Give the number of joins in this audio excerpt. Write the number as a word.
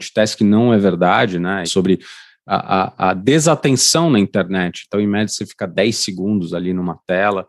one